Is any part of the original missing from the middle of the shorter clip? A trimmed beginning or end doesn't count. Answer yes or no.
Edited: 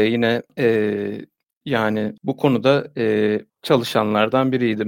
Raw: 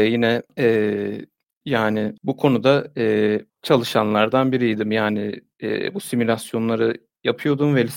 no